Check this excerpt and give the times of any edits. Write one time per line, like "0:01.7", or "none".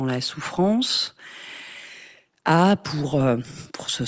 none